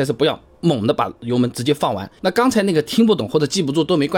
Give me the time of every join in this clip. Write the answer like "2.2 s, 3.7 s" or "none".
2.2 s